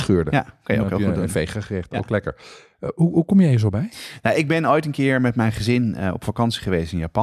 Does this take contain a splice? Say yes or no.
no